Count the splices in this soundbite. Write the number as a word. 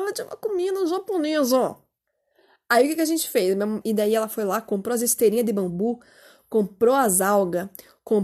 one